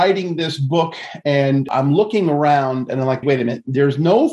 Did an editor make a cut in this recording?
yes; 1 cut; at 3.2 s

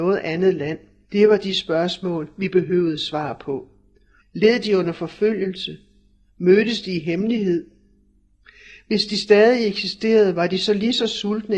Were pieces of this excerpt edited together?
yes; 2 cuts; at 1.0 s, 4.2 s

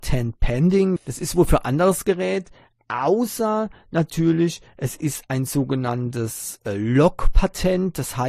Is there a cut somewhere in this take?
yes; 1 cut; at 1.0 s

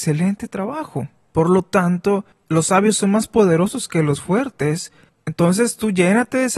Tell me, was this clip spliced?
yes; 1 cut; at 1.3 s

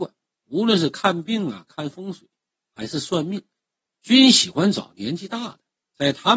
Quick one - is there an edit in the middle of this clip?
no; 0 cuts

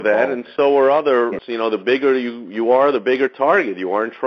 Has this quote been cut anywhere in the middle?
yes; 1 cut; at 1.4 s

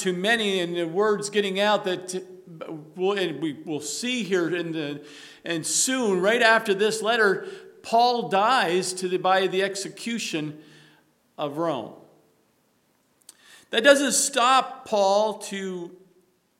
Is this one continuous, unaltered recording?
yes; 0 cuts

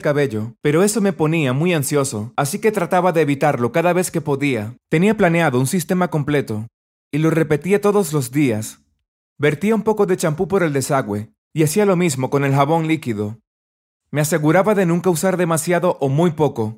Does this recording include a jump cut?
yes; 1 cut; at 4.8 s

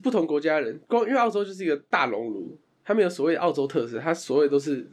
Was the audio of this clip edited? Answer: no; 0 cuts

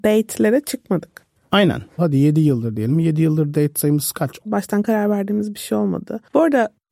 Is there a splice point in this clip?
yes; 2 cuts; at 2.0 s, 4.5 s

